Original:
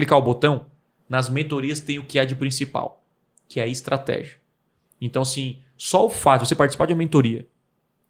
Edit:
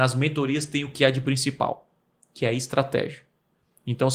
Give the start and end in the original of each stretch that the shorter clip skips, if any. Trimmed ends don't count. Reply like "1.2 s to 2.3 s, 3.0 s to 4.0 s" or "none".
none